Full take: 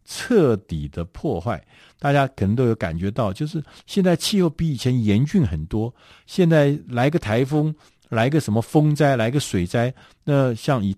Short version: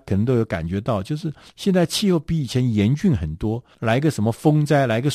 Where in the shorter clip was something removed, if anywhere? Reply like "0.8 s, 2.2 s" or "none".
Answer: 3.7 s